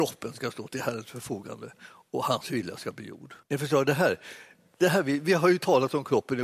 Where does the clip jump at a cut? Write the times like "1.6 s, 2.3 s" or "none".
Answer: 3.4 s